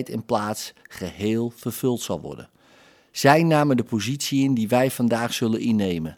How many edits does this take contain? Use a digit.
0